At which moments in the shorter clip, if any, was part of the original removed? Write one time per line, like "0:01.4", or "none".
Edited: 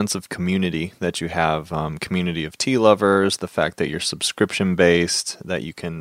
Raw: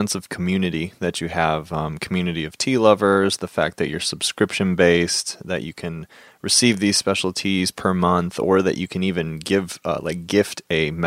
none